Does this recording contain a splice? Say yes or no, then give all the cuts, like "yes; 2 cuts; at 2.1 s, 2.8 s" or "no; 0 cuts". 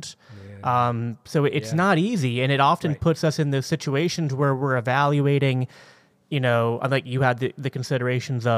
no; 0 cuts